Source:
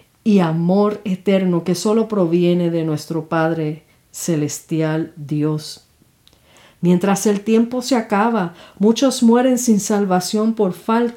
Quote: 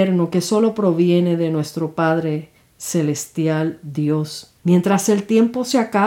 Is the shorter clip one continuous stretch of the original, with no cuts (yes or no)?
no